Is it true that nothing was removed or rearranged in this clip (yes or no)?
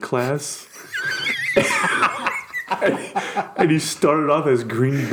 yes